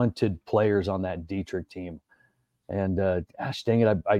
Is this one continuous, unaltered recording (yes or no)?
yes